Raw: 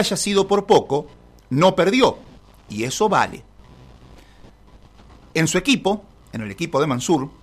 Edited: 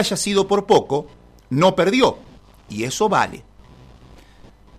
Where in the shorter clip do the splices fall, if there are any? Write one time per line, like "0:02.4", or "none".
none